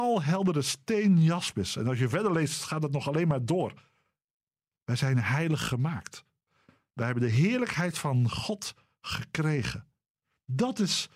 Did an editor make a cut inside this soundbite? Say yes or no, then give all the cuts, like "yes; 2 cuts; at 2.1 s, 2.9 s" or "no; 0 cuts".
no; 0 cuts